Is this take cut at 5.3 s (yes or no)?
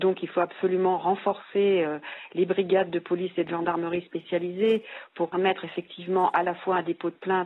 yes